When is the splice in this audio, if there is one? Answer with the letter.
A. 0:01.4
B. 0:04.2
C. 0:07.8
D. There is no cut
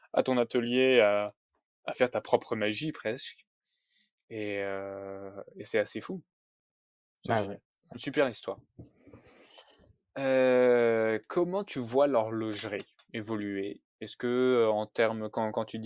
D